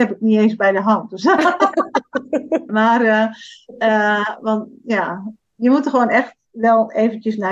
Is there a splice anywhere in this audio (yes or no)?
yes